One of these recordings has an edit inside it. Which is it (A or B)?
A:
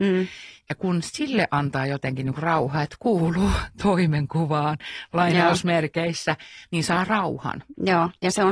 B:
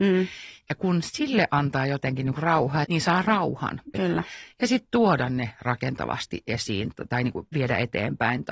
B